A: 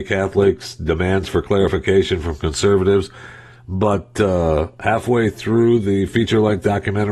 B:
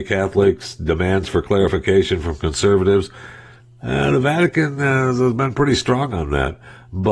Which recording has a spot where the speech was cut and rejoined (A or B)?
A